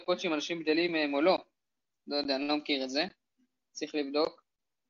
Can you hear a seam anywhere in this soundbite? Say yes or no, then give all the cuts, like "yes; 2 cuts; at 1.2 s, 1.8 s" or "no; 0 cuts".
no; 0 cuts